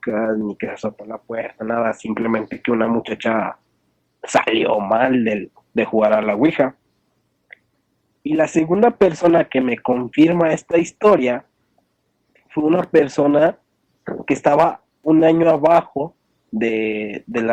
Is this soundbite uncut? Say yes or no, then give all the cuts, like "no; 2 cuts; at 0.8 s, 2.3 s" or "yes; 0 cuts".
yes; 0 cuts